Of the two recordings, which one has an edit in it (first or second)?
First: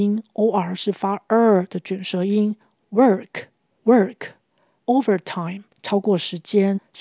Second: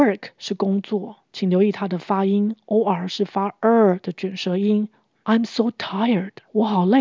second